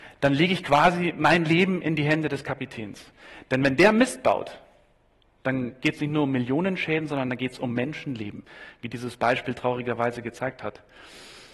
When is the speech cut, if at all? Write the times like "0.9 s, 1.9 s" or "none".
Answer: none